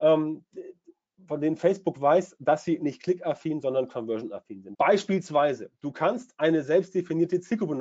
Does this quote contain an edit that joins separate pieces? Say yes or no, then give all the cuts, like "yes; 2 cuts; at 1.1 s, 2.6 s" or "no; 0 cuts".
yes; 1 cut; at 4.7 s